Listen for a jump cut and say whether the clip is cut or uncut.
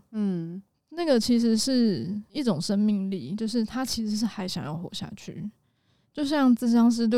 uncut